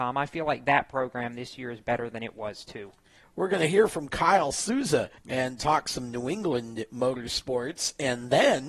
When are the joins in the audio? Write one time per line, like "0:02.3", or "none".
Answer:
0:03.2
0:05.2